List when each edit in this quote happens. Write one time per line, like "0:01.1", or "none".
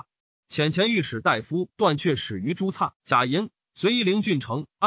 0:02.9